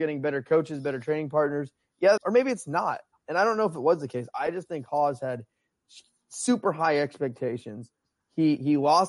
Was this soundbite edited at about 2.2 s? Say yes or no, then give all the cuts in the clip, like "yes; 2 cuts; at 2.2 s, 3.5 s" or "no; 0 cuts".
yes; 1 cut; at 2.2 s